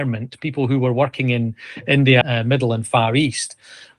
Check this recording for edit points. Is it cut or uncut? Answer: cut